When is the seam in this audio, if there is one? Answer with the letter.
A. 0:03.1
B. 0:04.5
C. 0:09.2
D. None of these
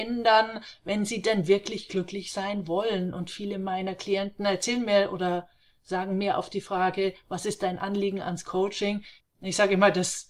C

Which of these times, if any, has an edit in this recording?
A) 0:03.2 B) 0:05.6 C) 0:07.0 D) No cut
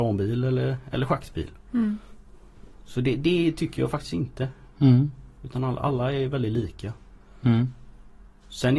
D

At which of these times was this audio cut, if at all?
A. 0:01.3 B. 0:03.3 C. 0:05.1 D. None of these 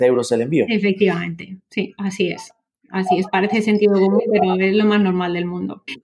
D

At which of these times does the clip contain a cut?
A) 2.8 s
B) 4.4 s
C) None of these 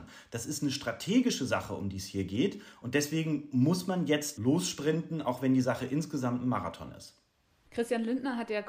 B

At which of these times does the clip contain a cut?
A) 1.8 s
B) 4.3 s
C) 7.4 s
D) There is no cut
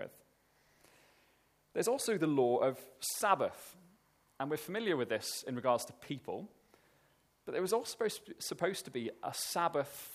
D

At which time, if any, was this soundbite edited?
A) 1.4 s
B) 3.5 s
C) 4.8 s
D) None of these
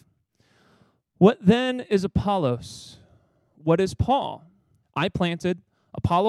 C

